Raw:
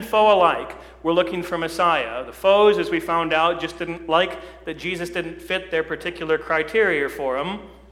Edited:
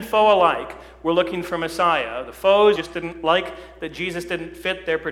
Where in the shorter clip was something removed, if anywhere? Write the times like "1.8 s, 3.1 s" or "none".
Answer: 2.8 s